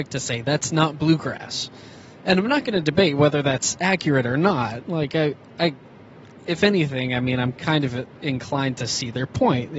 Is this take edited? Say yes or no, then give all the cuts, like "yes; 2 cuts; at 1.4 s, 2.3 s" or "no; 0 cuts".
no; 0 cuts